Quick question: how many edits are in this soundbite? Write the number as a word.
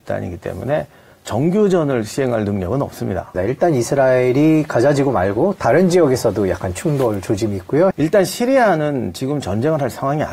two